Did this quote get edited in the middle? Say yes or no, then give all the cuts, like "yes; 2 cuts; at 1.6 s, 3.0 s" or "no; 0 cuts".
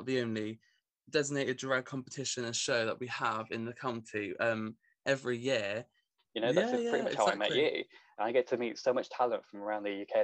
yes; 2 cuts; at 6.2 s, 8.2 s